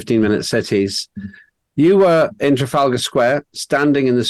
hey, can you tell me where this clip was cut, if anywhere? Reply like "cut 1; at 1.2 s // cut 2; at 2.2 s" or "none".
none